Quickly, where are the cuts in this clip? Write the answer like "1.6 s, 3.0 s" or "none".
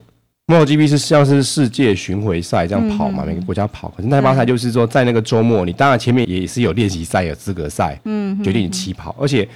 6.2 s